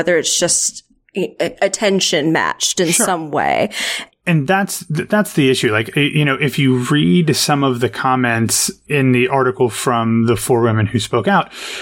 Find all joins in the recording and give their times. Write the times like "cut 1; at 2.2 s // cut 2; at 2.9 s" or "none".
cut 1; at 4.1 s // cut 2; at 8.9 s